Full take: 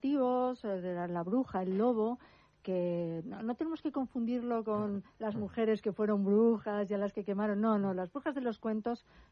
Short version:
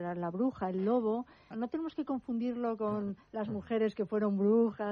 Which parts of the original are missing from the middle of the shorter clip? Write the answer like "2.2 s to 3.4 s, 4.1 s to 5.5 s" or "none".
2.4 s to 3.4 s